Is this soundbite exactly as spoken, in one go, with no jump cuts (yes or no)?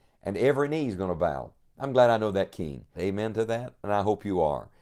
no